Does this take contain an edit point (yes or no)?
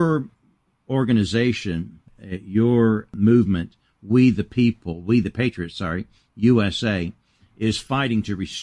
no